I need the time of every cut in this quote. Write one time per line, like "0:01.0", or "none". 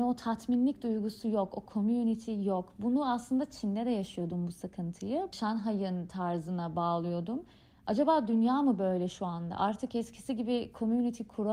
none